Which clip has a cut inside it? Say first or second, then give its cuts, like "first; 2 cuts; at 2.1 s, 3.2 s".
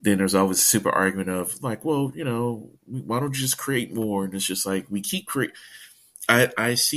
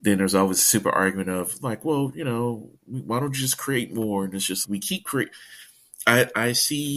second; 1 cut; at 4.6 s